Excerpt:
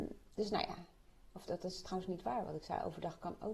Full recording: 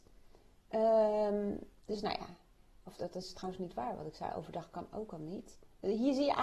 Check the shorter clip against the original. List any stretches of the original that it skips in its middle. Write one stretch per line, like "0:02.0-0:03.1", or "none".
none